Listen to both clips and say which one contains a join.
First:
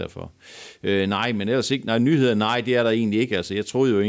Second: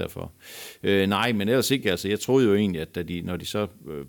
second; 1 cut; at 1.8 s

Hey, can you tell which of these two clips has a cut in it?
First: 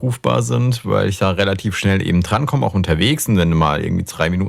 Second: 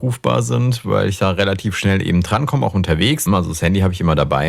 second; 1 cut; at 3.3 s

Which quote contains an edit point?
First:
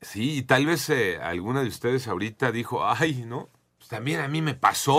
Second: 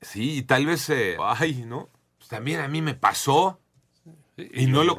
second; 1 cut; at 1.2 s

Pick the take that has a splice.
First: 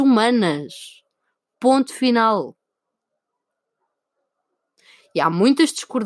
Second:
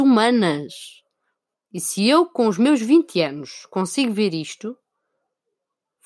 second; 1 cut; at 1.5 s

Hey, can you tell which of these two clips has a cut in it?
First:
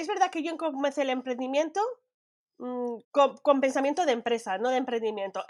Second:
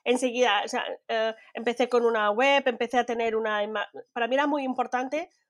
first; 1 cut; at 3.0 s

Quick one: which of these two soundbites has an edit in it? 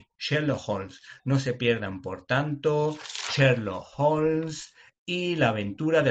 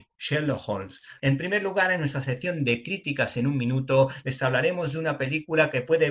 second; 1 cut; at 1.2 s

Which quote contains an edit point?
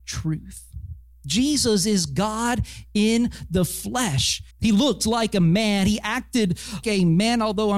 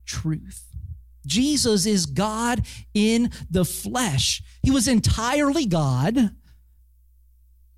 first; 2 cuts; at 4.5 s, 6.8 s

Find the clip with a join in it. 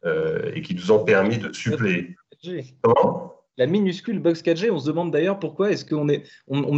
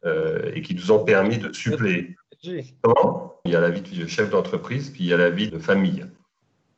second; 2 cuts; at 3.5 s, 5.5 s

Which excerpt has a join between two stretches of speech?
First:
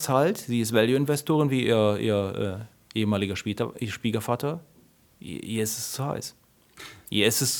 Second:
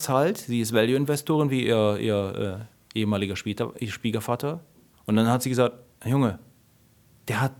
second; 1 cut; at 4.9 s

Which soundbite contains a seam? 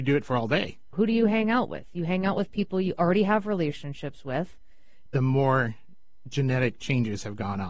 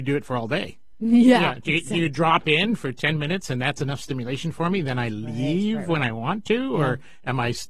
first; 2 cuts; at 0.9 s, 5.1 s

